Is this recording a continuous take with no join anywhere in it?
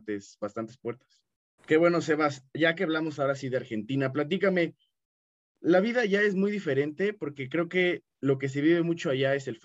no; 1 cut; at 1.6 s

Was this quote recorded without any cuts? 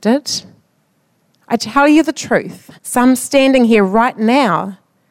no; 2 cuts; at 1.4 s, 2.8 s

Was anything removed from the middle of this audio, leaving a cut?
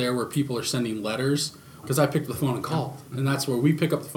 yes; 1 cut; at 1.8 s

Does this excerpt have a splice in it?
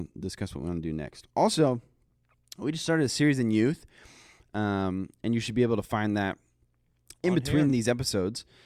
no; 0 cuts

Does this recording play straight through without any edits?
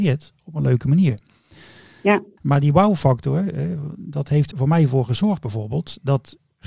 no; 2 cuts; at 2.4 s, 4.5 s

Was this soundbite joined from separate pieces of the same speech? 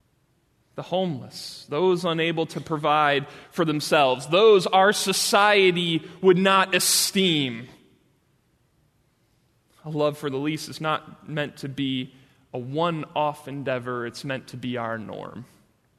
no; 0 cuts

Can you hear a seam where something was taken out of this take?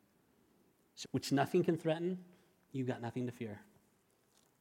yes; 1 cut; at 1.0 s

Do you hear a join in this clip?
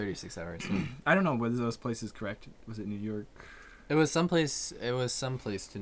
no; 0 cuts

